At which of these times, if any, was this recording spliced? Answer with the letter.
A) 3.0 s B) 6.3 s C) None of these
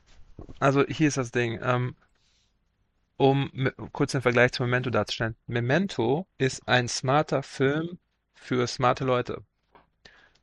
B